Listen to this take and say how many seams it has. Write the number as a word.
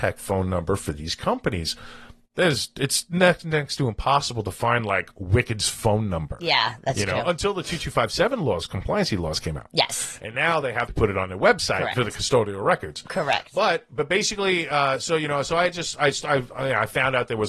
one